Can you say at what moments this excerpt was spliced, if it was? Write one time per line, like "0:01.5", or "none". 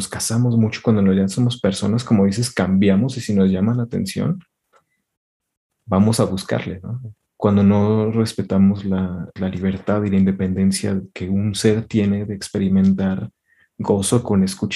0:07.2
0:09.4

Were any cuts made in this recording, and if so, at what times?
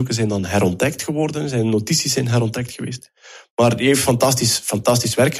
none

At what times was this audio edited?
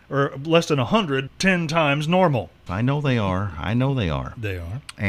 0:01.3
0:02.7

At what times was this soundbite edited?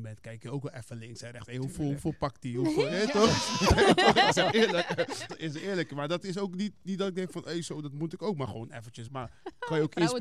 0:05.3
0:09.1

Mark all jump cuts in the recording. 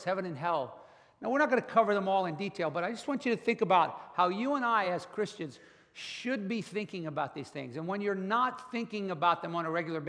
none

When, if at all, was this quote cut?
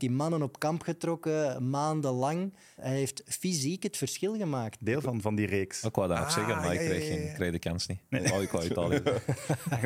0:02.8
0:04.8

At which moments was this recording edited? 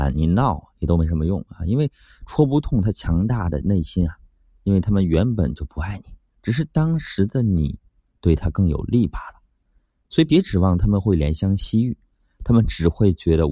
none

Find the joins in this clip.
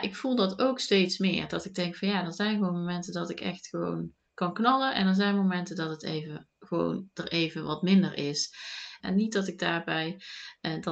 0:09.0

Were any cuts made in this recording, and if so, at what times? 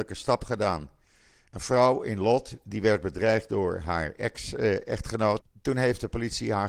0:05.4

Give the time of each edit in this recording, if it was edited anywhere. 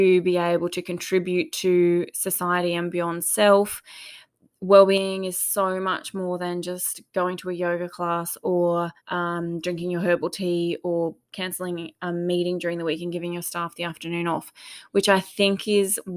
0:09.0

